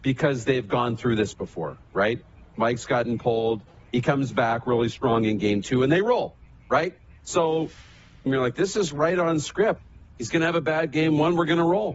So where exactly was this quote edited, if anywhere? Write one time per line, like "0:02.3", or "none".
0:02.5
0:08.3